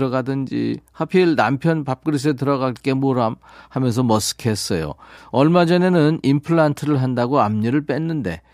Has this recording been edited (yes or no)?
yes